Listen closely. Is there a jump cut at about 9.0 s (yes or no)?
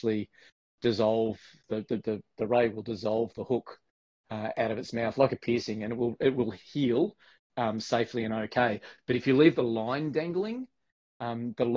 no